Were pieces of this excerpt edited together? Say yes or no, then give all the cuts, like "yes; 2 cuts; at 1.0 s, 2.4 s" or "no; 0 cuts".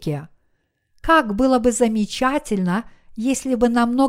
yes; 1 cut; at 0.9 s